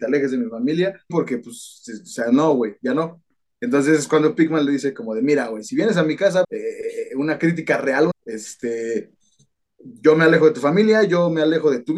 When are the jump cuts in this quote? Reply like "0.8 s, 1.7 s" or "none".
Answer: 1.1 s, 6.4 s, 8.1 s